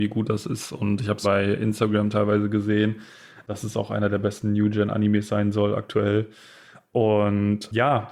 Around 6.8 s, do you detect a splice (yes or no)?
no